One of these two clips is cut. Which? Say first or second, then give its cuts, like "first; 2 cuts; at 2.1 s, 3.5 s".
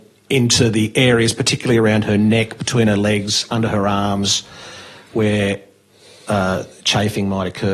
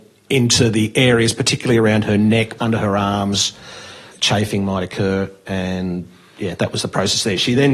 second; 2 cuts; at 2.6 s, 4.1 s